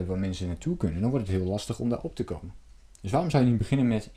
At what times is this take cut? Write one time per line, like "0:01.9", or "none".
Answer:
none